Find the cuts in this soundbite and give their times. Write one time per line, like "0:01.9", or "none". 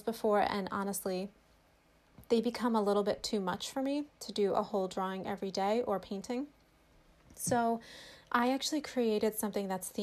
none